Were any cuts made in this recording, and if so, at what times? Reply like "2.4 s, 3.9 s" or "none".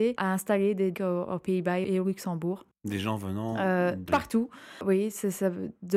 0.9 s, 4.1 s